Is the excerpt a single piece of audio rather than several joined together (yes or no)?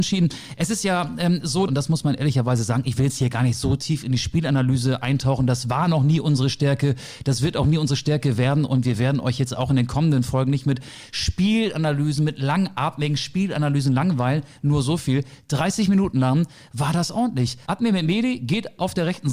no